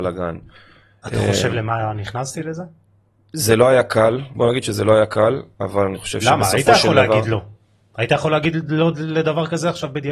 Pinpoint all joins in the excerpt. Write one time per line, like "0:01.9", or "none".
0:04.3